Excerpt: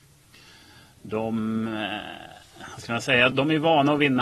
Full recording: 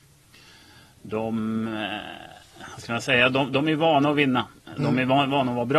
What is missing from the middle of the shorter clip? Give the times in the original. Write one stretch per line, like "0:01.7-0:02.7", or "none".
0:03.3-0:03.5